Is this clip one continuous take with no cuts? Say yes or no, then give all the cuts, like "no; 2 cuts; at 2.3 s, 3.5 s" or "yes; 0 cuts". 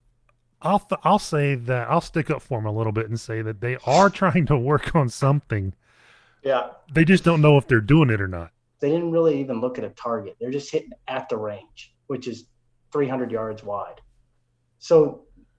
no; 1 cut; at 8.8 s